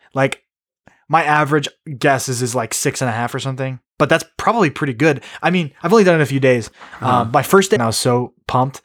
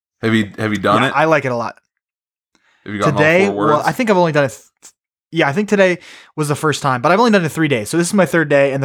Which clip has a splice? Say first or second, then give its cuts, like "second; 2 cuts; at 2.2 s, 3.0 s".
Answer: first; 1 cut; at 7.8 s